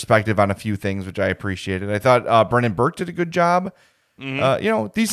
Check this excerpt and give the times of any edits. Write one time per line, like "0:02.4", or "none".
none